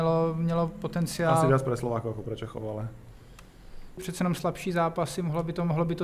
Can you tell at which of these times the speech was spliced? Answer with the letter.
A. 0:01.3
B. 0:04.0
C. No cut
B